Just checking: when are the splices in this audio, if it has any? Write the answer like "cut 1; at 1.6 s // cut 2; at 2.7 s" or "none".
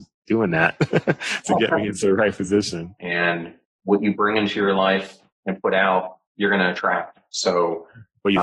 cut 1; at 3.0 s